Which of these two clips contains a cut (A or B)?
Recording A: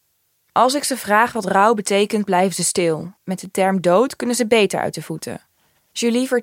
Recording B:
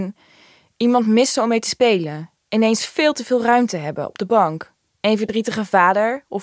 A